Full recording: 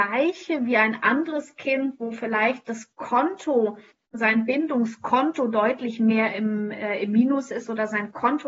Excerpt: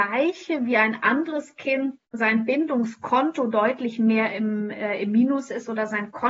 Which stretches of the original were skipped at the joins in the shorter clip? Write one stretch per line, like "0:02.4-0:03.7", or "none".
0:02.0-0:04.0